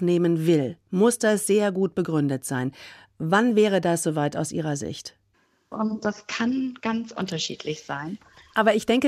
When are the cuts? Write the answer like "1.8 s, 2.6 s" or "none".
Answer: 5.7 s